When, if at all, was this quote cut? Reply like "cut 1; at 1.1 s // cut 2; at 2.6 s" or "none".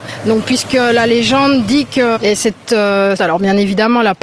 cut 1; at 2.2 s // cut 2; at 3.2 s